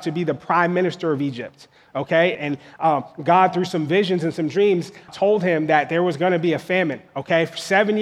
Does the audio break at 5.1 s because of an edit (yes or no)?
yes